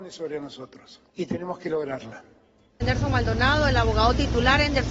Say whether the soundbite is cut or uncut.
cut